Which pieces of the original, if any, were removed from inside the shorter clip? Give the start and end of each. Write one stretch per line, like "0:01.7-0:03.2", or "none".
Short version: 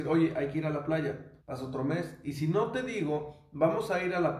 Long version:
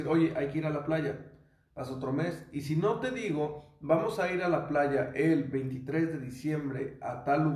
0:01.4-0:01.7